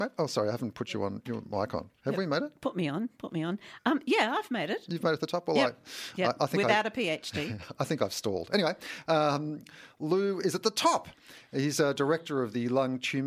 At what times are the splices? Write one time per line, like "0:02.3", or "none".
none